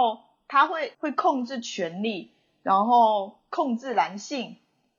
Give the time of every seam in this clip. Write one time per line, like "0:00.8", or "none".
0:00.9